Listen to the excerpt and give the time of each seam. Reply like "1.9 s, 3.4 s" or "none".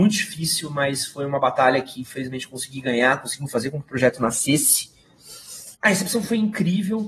5.7 s